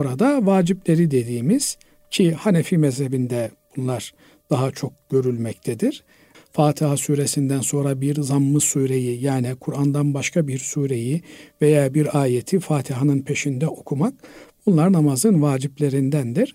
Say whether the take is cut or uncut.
cut